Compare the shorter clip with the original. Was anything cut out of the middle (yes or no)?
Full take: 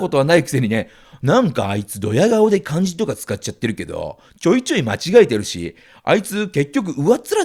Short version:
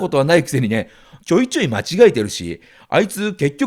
yes